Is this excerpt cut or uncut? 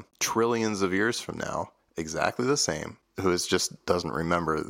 uncut